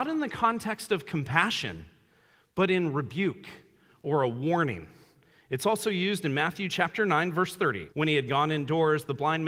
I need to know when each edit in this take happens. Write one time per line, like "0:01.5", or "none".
0:07.9